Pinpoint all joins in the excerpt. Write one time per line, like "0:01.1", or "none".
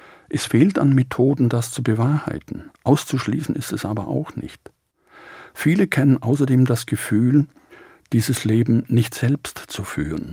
none